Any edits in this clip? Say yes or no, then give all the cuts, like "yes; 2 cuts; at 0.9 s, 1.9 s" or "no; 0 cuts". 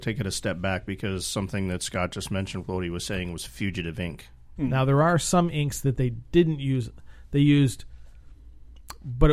yes; 1 cut; at 4.6 s